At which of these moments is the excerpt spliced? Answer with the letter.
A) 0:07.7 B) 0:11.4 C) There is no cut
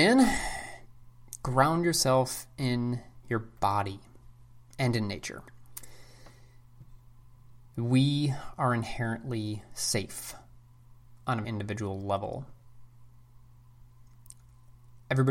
B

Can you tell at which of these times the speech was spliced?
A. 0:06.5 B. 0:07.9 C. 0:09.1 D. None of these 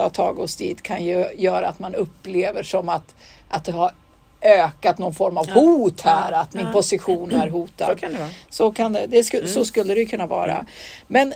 D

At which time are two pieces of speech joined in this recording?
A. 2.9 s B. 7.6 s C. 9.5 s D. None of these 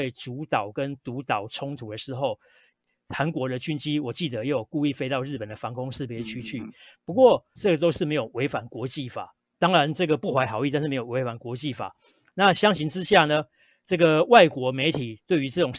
B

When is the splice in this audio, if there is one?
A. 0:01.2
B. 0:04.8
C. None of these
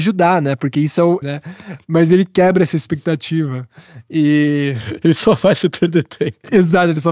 A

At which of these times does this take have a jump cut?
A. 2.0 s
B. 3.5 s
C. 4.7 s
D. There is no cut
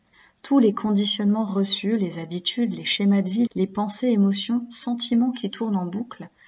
B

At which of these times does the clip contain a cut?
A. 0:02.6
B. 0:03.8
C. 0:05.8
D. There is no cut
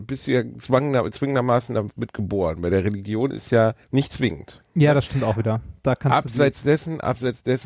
B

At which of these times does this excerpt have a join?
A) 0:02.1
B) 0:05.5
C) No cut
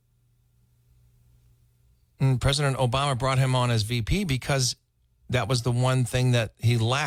C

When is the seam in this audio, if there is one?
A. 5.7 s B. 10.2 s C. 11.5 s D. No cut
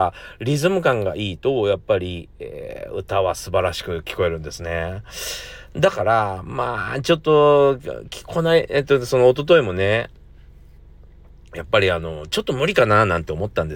D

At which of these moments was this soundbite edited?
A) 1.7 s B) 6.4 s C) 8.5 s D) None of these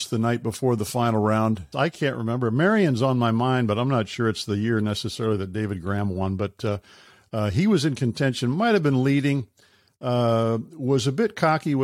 A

